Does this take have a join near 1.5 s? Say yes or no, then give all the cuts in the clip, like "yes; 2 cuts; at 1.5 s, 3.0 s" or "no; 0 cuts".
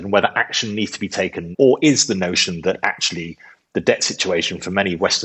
yes; 1 cut; at 1.5 s